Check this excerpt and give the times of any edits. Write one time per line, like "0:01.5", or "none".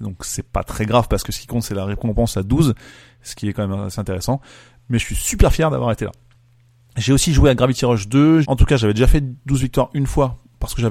0:08.4